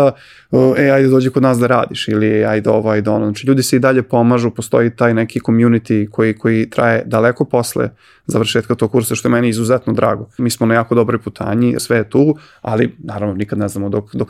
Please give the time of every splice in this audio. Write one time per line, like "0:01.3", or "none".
0:10.4
0:11.8